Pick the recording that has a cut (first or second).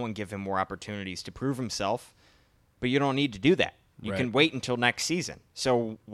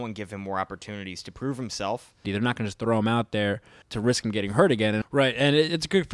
second